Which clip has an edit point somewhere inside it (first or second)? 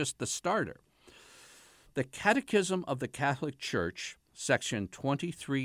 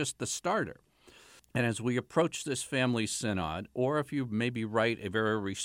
second